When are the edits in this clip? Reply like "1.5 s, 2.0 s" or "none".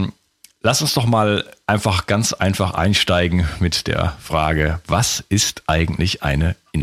none